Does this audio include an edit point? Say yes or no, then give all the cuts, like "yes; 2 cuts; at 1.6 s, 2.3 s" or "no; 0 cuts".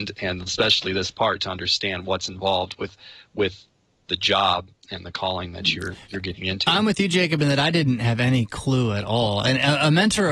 no; 0 cuts